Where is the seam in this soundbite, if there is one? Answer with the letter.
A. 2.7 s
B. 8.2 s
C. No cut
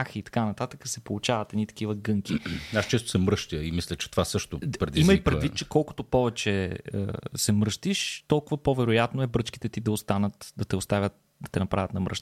C